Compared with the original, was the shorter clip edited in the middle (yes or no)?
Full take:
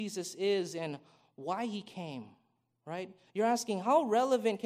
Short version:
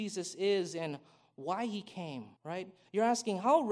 yes